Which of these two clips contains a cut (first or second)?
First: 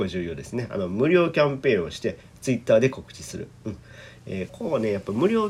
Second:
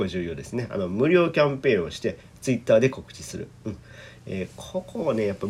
first